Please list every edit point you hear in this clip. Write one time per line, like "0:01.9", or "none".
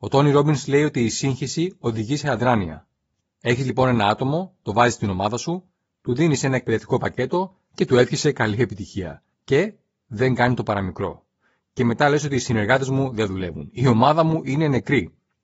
none